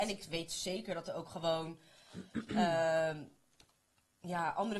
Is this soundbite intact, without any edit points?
yes; 0 cuts

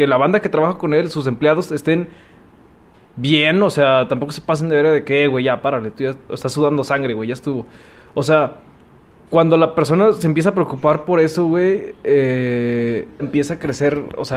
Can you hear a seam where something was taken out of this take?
yes; 2 cuts; at 6.3 s, 13.2 s

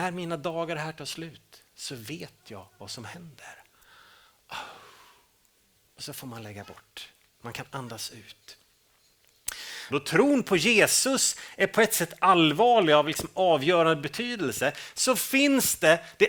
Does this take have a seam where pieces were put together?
yes; 1 cut; at 9.9 s

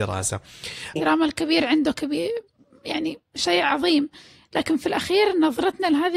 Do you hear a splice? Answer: yes; 1 cut; at 1.0 s

